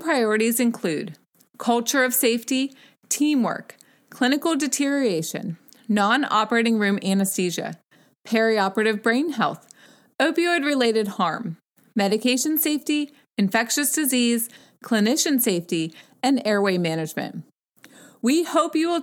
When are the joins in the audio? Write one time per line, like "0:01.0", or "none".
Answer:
none

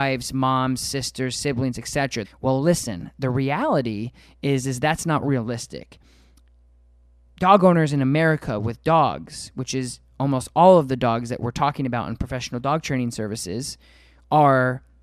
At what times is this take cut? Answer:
0:02.2

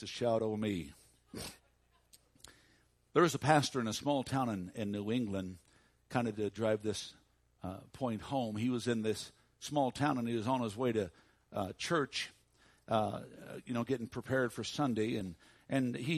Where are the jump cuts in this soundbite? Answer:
0:01.6

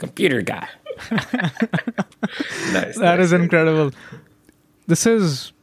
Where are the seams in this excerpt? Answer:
none

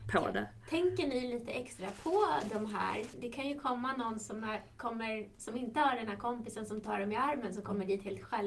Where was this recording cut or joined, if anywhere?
0:03.1

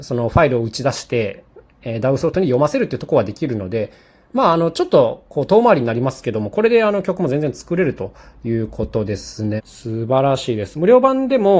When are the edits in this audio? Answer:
0:09.6

